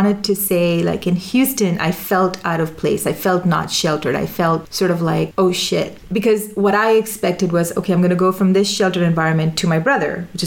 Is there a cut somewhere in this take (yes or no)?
no